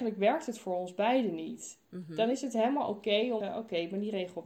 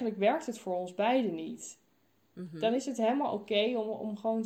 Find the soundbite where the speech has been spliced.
first; 2 cuts; at 1.8 s, 3.4 s

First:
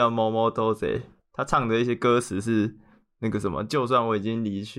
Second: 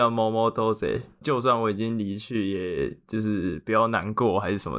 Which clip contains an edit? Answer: second; 1 cut; at 1.2 s

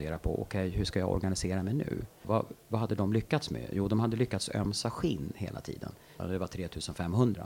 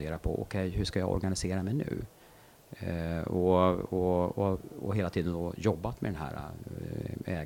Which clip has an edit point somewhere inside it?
first; 2 cuts; at 2.2 s, 6.2 s

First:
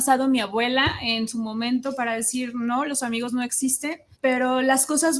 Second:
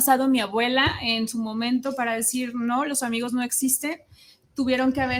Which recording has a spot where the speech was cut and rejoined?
first; 1 cut; at 4.1 s

